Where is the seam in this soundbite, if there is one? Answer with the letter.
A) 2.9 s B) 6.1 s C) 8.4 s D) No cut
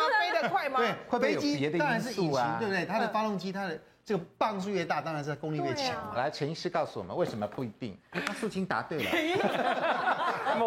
B